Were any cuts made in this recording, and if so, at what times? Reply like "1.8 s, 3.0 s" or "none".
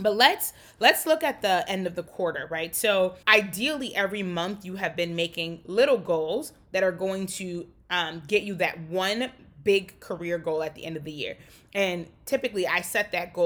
3.2 s